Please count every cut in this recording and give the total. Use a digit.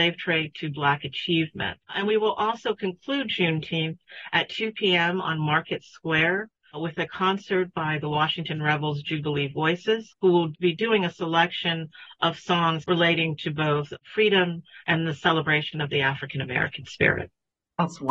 2